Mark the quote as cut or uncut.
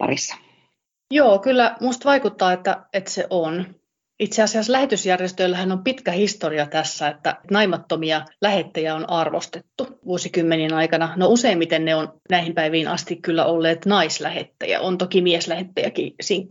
uncut